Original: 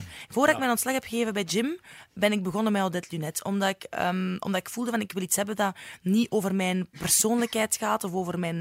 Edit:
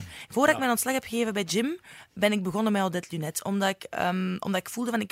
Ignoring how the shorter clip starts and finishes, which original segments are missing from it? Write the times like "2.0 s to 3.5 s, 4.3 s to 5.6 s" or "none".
none